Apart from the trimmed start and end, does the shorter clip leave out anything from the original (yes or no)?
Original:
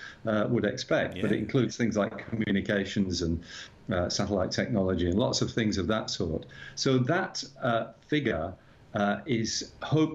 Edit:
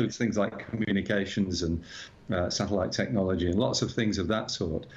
no